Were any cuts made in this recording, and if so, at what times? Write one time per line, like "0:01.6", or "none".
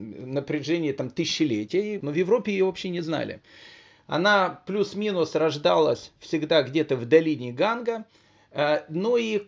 0:02.0